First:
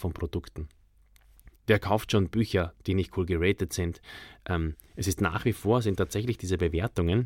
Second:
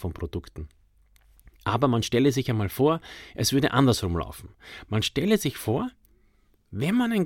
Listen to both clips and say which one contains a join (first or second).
first